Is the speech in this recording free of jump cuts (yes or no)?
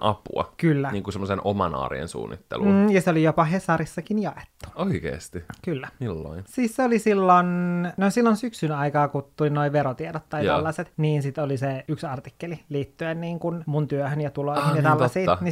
yes